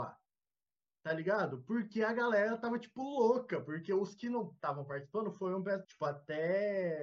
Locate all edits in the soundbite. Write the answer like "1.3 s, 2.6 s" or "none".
5.8 s